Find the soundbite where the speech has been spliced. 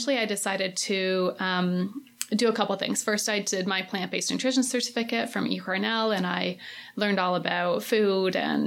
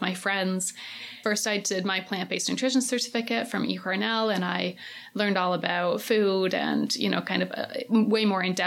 second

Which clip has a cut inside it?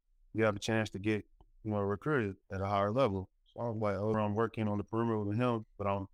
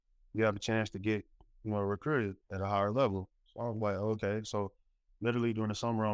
first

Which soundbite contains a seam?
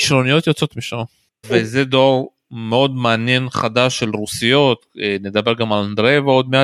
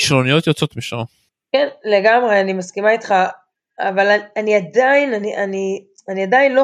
first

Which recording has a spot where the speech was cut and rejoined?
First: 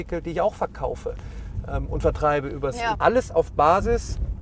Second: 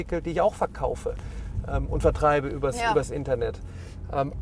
first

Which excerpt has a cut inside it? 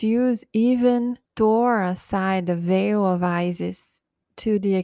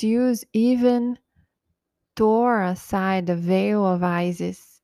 first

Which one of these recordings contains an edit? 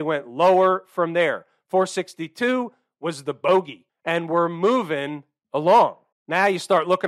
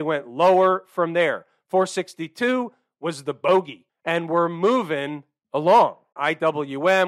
second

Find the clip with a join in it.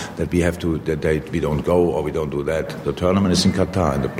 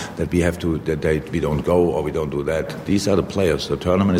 first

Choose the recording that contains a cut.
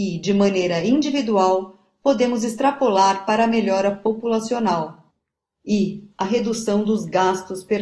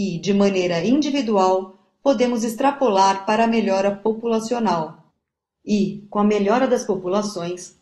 first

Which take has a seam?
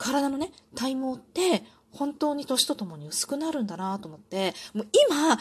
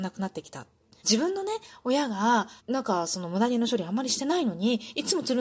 second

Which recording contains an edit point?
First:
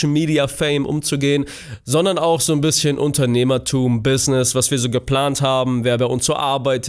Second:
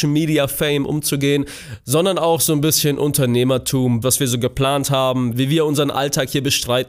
second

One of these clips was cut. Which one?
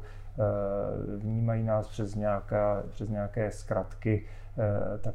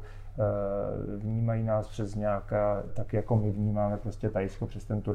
second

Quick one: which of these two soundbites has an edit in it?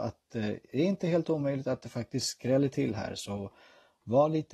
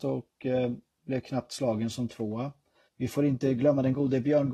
second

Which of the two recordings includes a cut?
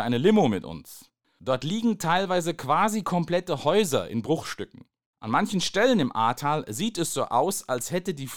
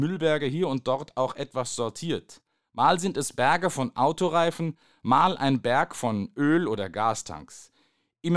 first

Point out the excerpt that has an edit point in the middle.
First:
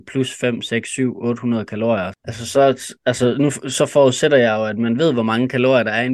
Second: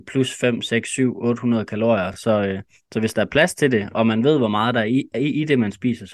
first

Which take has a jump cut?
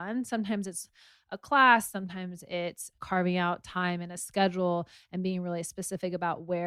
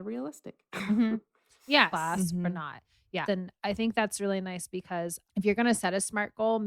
second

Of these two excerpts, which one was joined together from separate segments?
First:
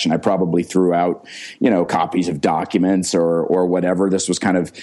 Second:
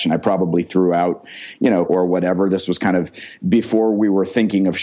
second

